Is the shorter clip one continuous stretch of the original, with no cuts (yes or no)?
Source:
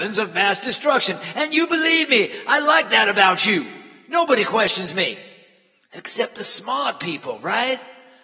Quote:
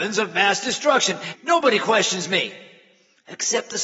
no